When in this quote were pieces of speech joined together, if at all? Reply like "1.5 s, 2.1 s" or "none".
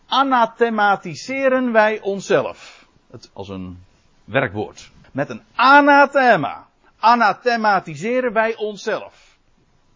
3.3 s, 5.0 s